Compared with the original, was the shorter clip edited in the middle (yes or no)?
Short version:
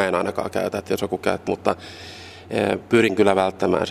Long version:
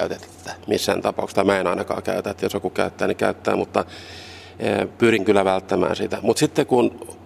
yes